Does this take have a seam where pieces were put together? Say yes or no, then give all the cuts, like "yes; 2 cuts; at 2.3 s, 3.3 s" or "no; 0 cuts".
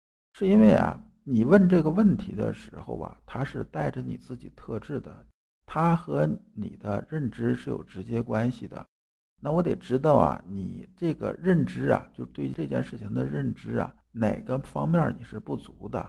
yes; 2 cuts; at 5.6 s, 9.3 s